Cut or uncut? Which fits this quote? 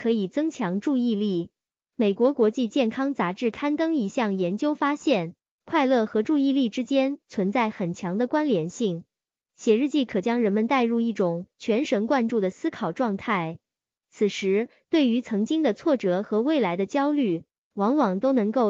uncut